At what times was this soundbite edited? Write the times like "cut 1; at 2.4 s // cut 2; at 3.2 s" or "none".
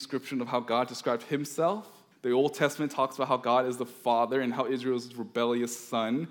cut 1; at 2.1 s